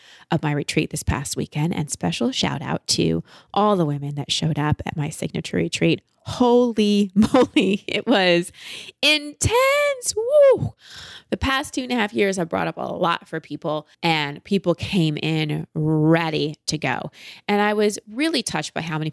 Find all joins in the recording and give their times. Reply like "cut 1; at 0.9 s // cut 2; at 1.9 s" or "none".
cut 1; at 13.9 s